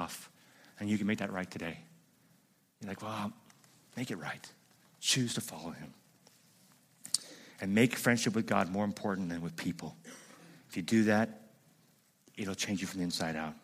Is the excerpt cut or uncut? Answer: uncut